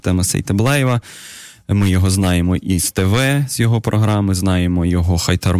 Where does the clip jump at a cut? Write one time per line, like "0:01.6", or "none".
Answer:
none